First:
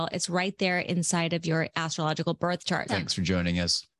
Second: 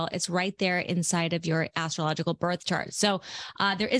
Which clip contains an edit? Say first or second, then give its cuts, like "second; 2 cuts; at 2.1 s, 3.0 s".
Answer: first; 1 cut; at 2.9 s